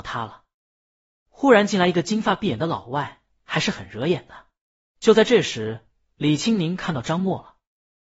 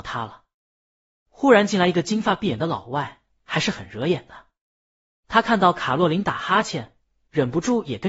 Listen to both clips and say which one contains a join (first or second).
first